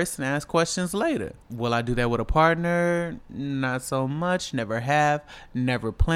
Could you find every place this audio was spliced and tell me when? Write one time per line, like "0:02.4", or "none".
none